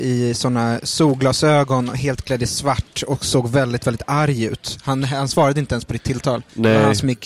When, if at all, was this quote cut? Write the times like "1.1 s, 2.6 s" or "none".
none

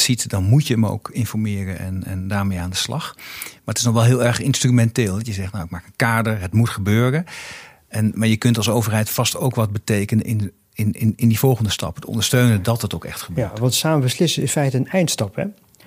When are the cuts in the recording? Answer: none

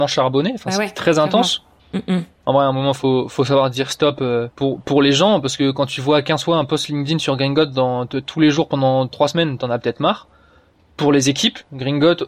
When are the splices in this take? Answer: 1.8 s, 4.5 s

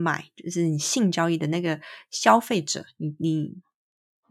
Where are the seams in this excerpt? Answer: 3.2 s

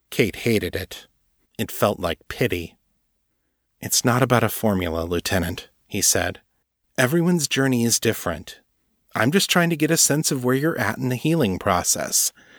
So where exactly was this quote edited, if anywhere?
none

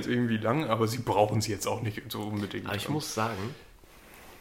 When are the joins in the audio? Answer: none

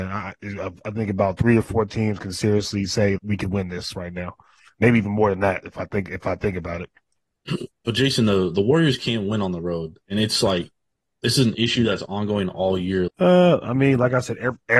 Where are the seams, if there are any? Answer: 3.2 s, 13.1 s

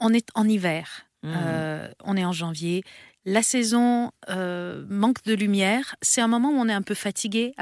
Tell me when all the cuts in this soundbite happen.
none

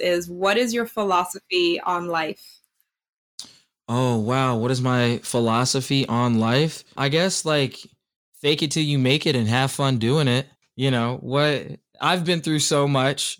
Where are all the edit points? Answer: none

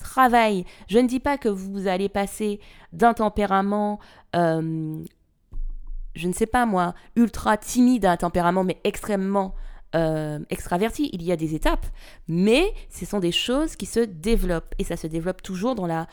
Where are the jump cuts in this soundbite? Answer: 2.9 s

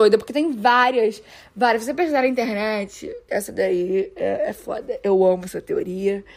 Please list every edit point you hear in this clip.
3.3 s

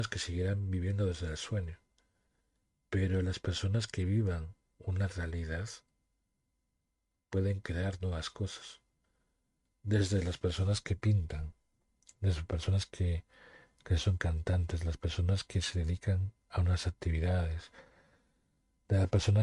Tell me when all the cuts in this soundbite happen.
none

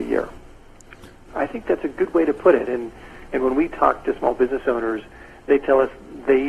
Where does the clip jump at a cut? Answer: 1.3 s

